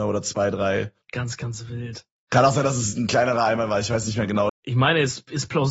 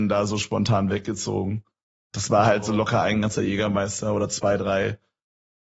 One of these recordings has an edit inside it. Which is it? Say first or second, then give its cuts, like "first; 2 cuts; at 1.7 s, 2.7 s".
first; 2 cuts; at 1.0 s, 4.5 s